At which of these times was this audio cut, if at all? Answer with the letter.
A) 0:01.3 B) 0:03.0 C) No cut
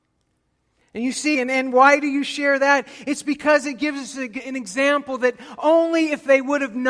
A